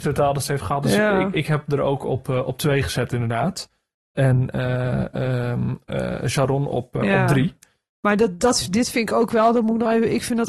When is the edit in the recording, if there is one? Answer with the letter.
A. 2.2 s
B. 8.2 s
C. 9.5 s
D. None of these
D